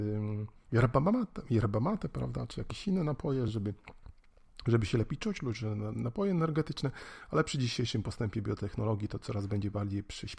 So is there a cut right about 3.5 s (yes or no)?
no